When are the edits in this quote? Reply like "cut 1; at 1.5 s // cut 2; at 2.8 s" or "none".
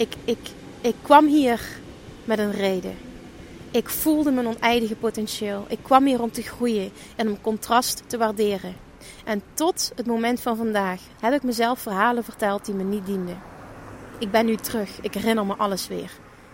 cut 1; at 11.1 s